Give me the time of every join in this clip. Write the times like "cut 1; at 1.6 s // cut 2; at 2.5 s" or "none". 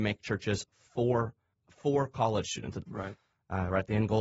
cut 1; at 1.5 s // cut 2; at 2.8 s